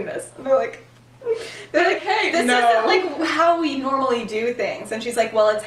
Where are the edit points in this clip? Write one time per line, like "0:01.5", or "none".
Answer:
0:02.0

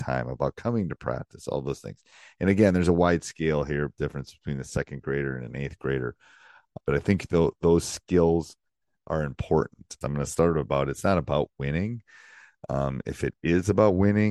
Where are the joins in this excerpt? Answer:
0:06.8
0:10.0

